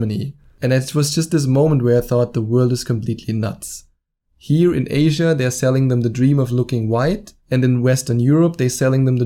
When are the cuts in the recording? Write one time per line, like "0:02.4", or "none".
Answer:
0:07.4